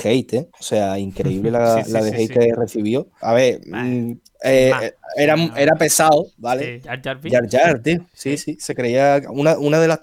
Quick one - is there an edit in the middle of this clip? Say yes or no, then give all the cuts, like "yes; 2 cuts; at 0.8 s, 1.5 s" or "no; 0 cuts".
yes; 2 cuts; at 3.2 s, 6.8 s